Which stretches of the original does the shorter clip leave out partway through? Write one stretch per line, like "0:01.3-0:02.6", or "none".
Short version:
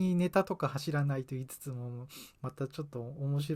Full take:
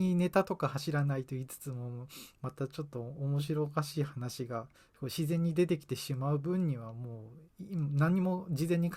none

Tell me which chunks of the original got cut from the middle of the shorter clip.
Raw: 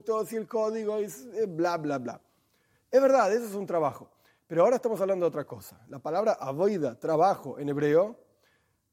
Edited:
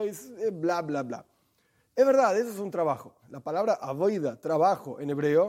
0:04.2-0:05.8

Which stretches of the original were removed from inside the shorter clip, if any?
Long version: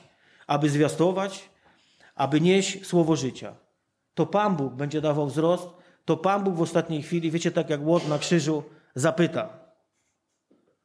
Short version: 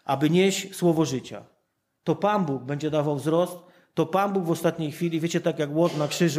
none

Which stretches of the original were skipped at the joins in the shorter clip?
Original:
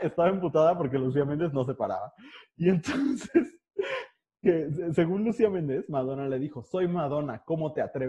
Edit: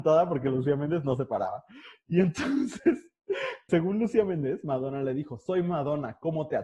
0:04.2-0:04.9

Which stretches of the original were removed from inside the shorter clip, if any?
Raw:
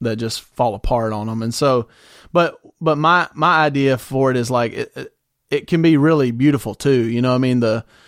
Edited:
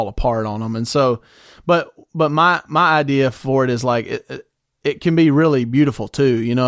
none

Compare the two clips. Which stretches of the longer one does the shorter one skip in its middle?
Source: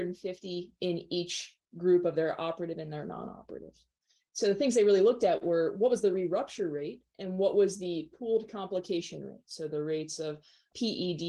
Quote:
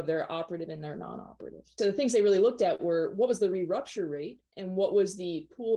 0:03.9-0:04.4

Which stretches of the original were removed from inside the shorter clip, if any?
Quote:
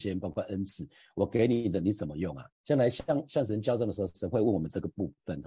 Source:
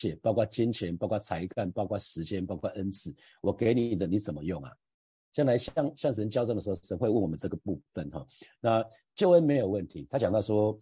0:04.8-0:05.2

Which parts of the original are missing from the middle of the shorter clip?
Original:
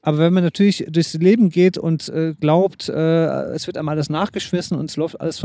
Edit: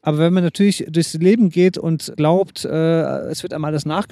0:02.1-0:02.3

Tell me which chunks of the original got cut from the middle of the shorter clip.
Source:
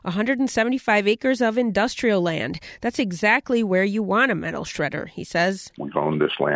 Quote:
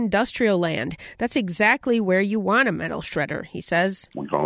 none

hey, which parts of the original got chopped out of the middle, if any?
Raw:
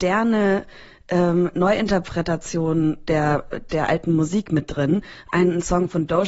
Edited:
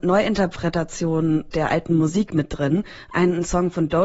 0:03.0-0:03.7

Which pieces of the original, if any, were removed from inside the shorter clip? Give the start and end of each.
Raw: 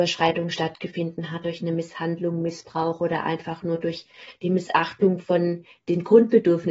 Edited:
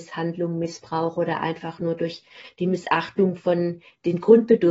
none

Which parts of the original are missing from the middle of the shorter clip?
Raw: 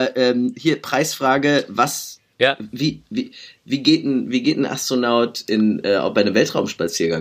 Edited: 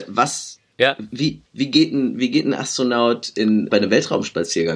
0:03.1-0:03.6
0:05.8-0:06.1

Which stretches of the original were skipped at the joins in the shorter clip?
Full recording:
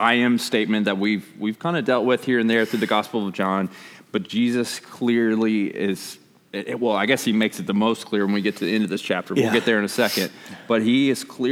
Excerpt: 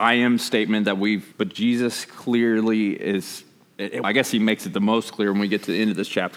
0:01.3-0:04.1
0:06.8-0:07.0

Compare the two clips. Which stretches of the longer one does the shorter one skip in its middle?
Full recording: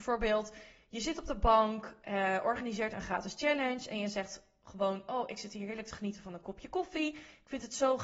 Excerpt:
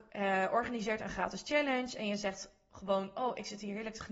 none

